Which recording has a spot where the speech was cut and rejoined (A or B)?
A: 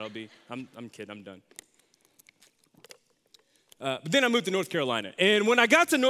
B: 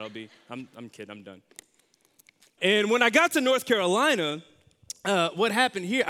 B